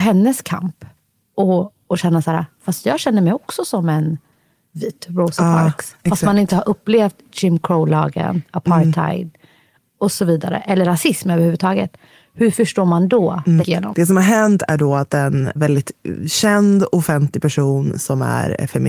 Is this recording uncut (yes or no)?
no